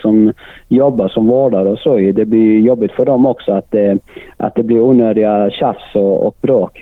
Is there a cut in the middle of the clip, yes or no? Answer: no